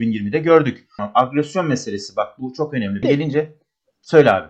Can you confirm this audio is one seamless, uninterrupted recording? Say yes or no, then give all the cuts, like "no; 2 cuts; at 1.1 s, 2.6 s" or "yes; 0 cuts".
no; 2 cuts; at 1.0 s, 3.0 s